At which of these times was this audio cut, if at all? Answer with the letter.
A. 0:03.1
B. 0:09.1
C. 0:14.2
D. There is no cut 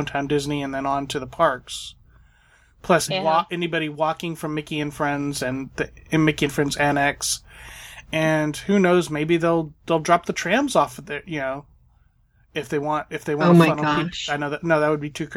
A